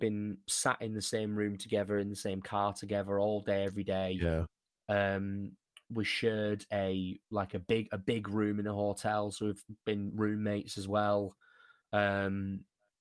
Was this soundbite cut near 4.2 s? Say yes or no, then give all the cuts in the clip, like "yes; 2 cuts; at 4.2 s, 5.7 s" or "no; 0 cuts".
no; 0 cuts